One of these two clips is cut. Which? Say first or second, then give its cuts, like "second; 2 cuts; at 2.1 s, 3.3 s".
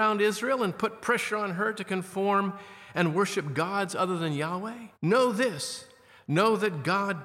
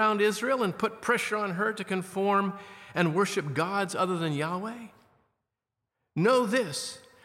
first; 1 cut; at 4.9 s